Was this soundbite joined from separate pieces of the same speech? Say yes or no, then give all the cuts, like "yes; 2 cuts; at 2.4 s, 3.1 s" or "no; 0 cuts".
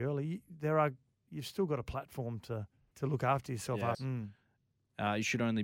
yes; 2 cuts; at 2.9 s, 3.9 s